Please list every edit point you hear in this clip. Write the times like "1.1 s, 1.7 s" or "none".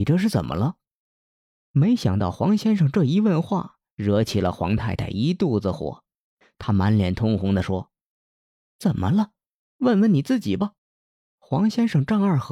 10.8 s